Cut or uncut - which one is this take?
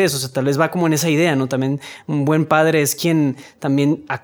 uncut